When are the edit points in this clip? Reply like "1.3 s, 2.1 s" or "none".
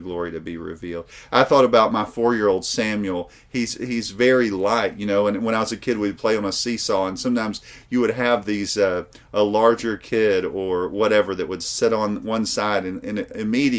none